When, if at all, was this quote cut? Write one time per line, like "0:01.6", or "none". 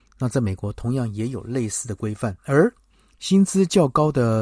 0:02.4